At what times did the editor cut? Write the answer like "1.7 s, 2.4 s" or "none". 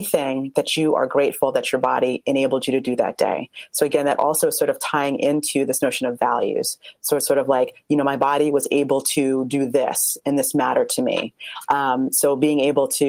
none